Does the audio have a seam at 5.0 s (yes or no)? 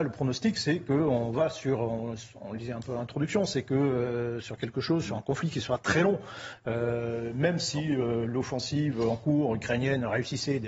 no